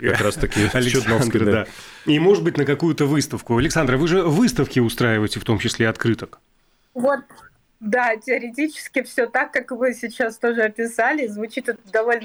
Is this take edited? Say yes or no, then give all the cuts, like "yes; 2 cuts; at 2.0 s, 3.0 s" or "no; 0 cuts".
no; 0 cuts